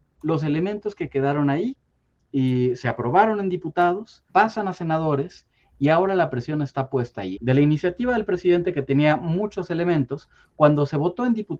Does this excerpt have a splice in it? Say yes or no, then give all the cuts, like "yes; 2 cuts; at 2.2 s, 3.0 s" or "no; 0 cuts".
yes; 2 cuts; at 4.3 s, 7.4 s